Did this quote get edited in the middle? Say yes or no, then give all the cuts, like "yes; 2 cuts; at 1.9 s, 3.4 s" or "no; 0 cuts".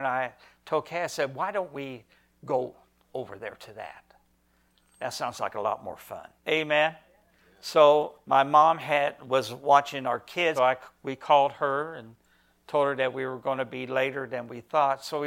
yes; 3 cuts; at 6.4 s, 8.2 s, 10.6 s